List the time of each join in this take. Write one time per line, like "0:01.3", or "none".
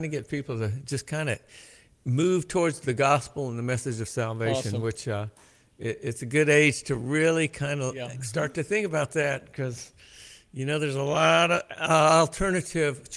none